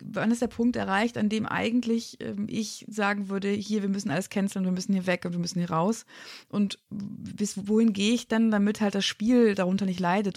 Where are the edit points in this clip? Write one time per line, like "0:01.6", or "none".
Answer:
none